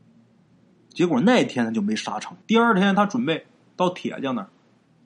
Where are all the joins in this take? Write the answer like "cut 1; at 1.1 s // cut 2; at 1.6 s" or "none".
cut 1; at 2.4 s